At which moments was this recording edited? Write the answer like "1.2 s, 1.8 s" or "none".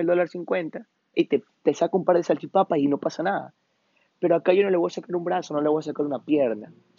1.1 s